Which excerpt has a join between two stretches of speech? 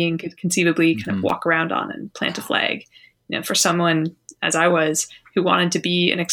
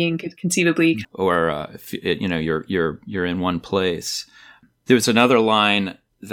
second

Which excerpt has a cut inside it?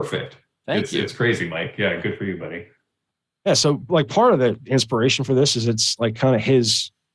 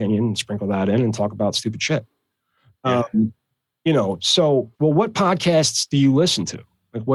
second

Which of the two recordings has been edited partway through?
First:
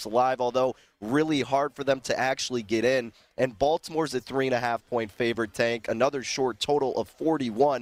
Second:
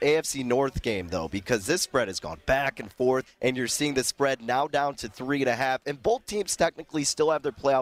second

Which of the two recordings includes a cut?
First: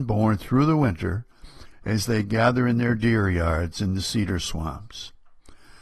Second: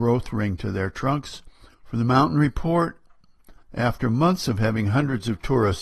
second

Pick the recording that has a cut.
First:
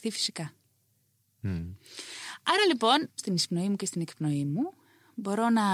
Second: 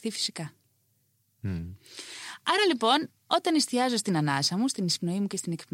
first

